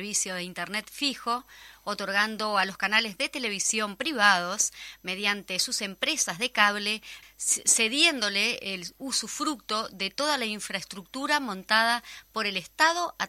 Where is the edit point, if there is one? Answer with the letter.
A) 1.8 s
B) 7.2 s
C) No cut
B